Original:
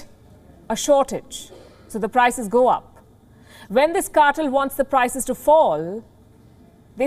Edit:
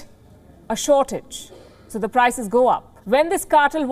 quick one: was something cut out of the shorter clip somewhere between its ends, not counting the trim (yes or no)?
yes